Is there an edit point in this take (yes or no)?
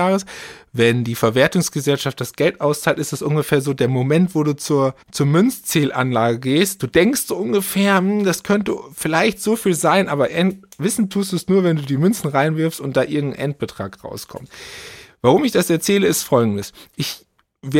no